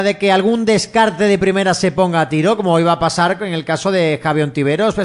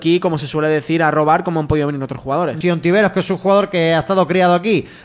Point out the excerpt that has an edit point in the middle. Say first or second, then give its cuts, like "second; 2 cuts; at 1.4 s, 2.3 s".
second; 1 cut; at 2.6 s